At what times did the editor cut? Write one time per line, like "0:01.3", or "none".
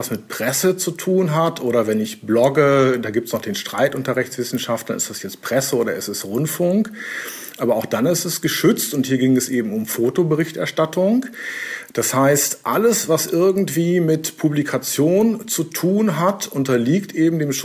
none